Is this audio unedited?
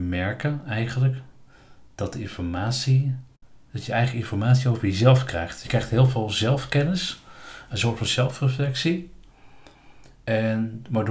yes; 0 cuts

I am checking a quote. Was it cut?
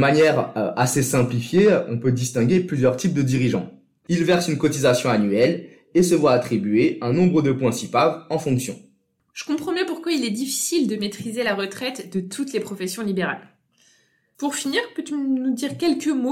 yes; 1 cut; at 4.0 s

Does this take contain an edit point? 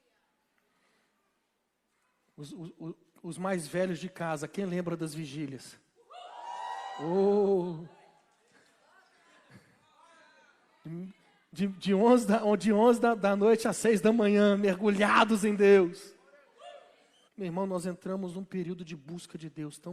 yes; 1 cut; at 17.3 s

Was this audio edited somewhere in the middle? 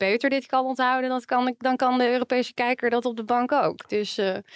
no; 0 cuts

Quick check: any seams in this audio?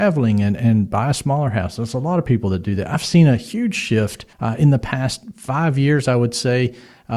yes; 1 cut; at 4.3 s

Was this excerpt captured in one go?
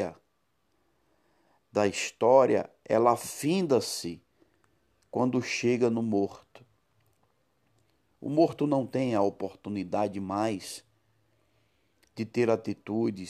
yes; 0 cuts

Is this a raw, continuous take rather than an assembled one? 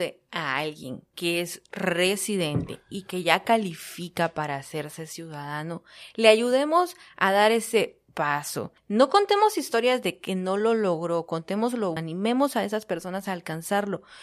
no; 1 cut; at 12.0 s

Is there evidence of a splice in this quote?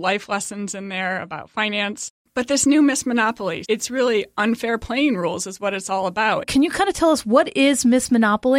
yes; 2 cuts; at 3.6 s, 6.4 s

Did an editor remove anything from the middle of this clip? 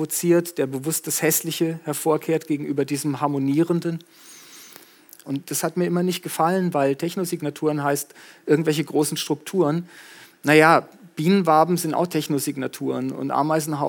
yes; 1 cut; at 5.2 s

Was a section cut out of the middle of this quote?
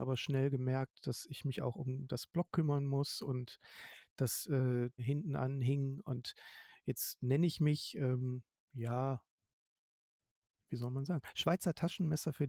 yes; 1 cut; at 5.0 s

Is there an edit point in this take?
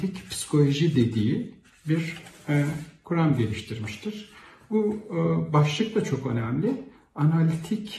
no; 0 cuts

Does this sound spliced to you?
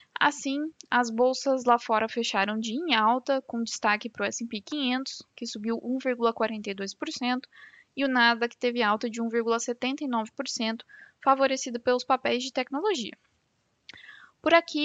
no; 0 cuts

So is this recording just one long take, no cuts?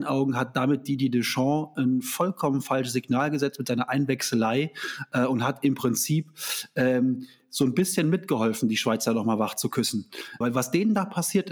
no; 1 cut; at 10.4 s

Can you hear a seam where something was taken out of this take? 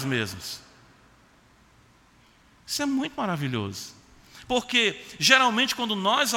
no; 0 cuts

